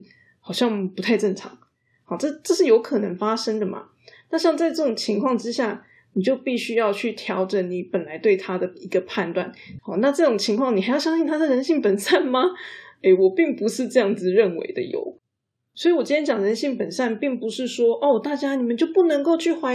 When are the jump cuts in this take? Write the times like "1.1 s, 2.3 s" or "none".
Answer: 9.8 s